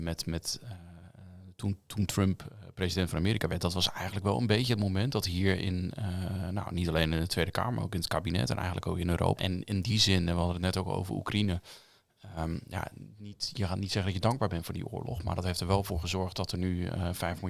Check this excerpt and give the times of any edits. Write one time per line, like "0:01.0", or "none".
0:09.4